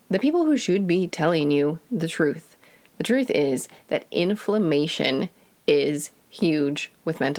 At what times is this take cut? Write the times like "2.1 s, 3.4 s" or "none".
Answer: none